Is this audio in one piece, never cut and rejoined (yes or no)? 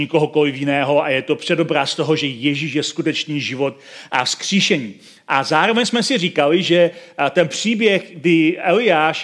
yes